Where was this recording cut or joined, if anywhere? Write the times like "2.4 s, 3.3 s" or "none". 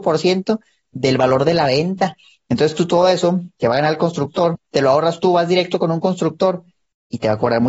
4.5 s